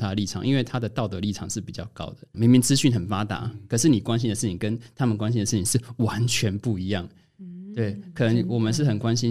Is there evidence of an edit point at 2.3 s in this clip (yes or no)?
yes